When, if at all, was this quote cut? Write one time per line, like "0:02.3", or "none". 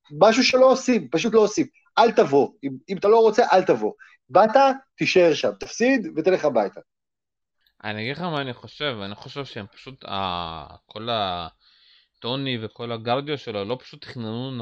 none